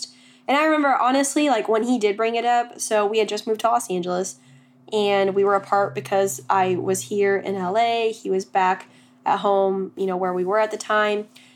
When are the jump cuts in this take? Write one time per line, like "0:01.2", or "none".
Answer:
none

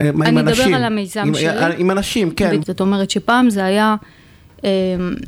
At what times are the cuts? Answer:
0:02.6

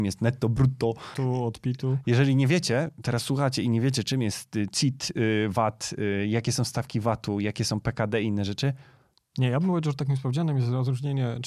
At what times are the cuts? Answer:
0:01.1

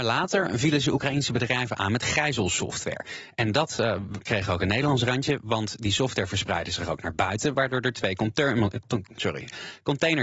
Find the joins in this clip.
none

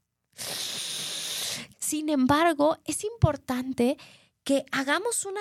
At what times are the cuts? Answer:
0:01.7

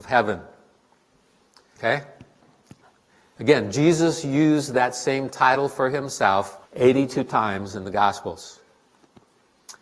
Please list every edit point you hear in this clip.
0:01.8
0:06.7

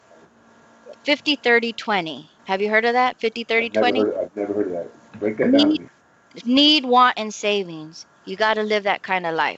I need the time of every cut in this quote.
0:02.4

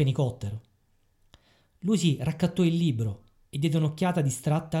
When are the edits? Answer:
none

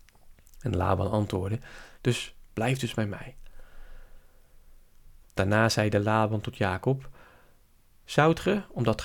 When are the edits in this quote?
0:02.0
0:05.2

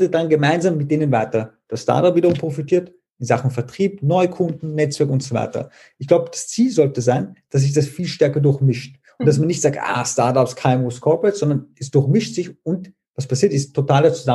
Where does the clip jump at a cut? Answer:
none

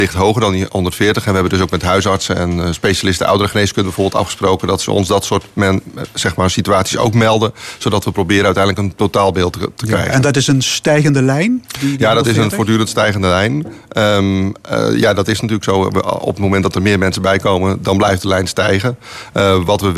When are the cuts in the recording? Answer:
none

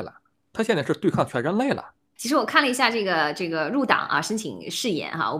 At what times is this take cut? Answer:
0:02.2

